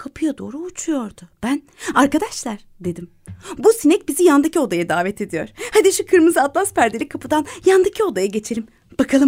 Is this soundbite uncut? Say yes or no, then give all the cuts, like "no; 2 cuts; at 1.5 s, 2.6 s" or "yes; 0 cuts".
yes; 0 cuts